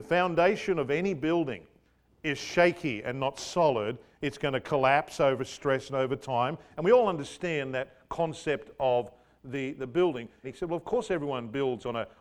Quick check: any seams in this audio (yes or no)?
yes